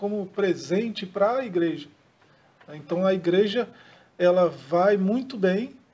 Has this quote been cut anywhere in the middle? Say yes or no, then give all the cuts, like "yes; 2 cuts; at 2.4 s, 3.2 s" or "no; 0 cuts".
no; 0 cuts